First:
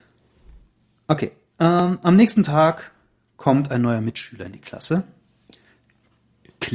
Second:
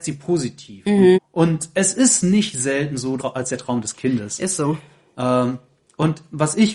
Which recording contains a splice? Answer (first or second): second